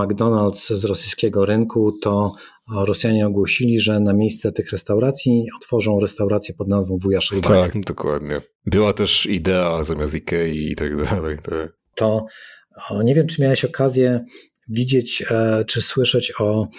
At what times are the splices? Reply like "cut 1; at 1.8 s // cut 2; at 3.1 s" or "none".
cut 1; at 7.7 s // cut 2; at 11.8 s